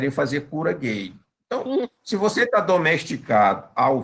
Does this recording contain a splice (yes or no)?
no